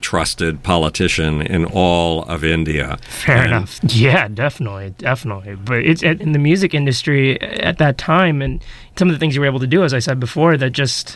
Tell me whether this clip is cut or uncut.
cut